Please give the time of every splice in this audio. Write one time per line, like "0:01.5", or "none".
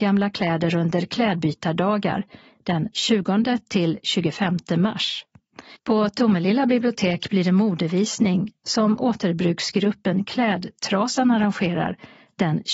0:05.7